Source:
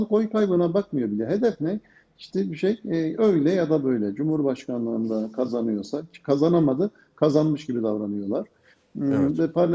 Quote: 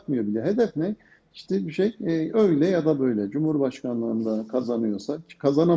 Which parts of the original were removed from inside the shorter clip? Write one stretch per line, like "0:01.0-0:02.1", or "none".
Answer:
none